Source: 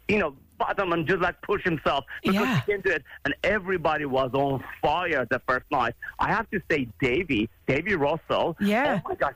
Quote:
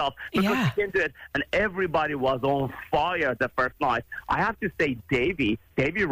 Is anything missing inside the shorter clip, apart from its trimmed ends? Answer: no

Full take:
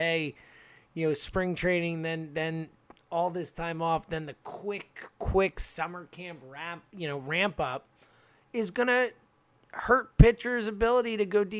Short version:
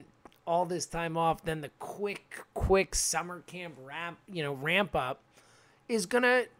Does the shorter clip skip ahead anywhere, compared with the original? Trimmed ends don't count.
no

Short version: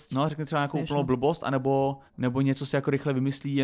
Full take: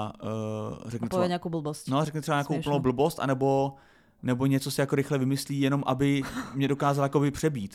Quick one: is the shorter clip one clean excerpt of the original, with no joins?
no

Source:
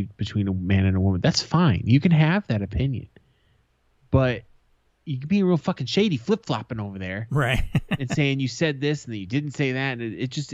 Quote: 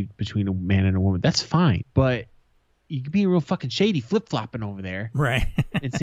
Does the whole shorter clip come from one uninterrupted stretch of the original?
no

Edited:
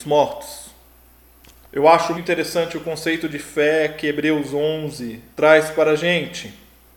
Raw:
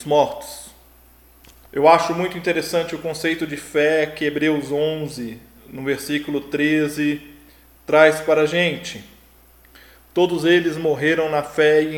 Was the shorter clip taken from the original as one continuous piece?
no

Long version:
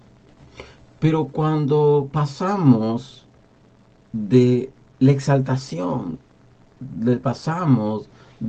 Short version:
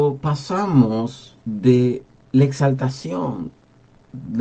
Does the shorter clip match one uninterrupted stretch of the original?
no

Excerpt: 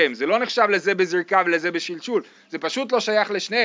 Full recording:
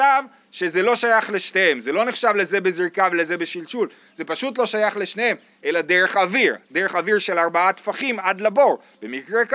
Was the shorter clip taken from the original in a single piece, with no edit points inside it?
yes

